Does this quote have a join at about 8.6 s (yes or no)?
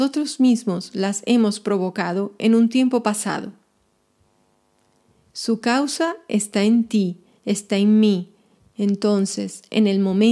yes